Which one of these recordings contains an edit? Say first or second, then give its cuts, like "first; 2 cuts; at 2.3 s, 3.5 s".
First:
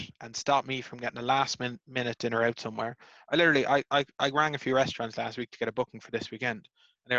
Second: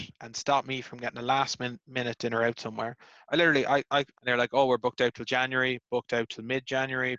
second; 1 cut; at 4.1 s